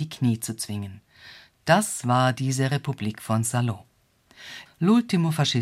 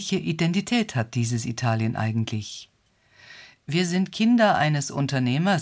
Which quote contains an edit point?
first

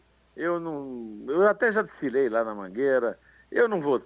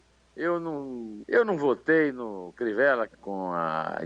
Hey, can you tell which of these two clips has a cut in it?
second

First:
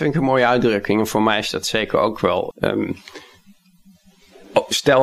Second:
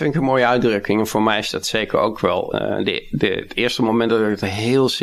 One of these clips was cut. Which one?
first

